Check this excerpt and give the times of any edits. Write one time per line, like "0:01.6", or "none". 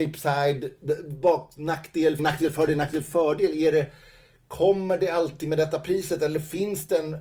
0:02.2